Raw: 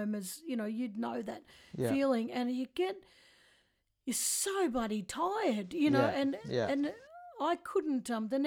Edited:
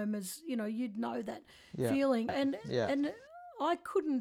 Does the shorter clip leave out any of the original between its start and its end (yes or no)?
yes